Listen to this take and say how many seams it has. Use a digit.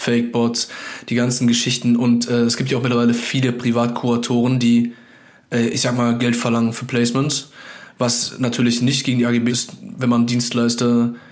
2